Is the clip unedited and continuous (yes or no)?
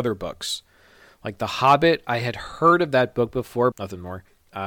no